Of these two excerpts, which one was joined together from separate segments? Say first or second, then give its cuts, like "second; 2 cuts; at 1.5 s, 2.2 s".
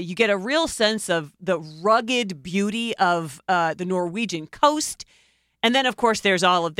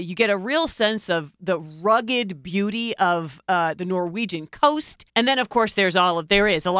second; 1 cut; at 5.1 s